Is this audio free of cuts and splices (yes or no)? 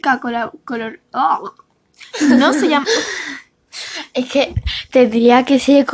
yes